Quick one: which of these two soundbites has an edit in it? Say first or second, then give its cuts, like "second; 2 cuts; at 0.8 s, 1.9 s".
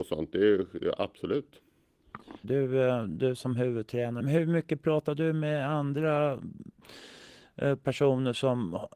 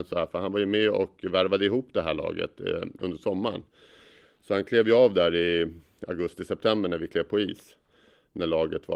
first; 2 cuts; at 2.4 s, 4.2 s